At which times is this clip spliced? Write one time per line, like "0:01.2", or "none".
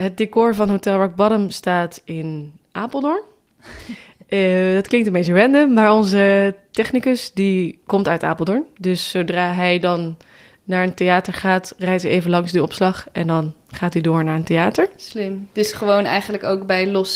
none